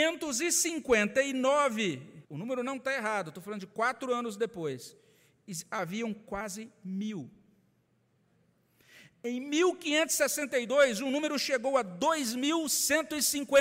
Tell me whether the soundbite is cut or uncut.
cut